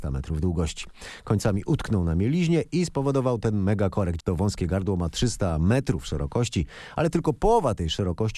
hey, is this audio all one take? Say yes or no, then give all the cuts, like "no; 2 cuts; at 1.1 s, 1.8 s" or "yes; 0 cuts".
no; 1 cut; at 4.2 s